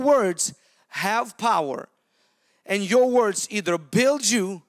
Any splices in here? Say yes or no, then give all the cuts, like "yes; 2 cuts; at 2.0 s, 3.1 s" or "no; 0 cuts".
no; 0 cuts